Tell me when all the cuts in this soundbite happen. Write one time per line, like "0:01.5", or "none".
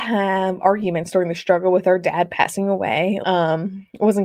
0:03.2